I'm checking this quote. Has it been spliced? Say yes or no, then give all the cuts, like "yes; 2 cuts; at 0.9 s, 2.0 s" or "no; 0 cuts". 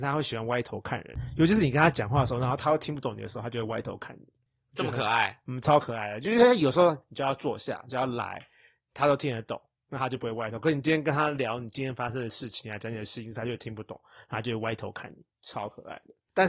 no; 0 cuts